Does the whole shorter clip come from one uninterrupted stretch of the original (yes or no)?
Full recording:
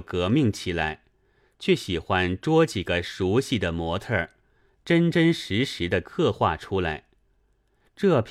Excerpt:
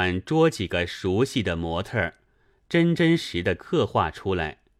no